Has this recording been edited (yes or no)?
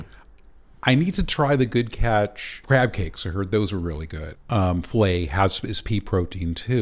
yes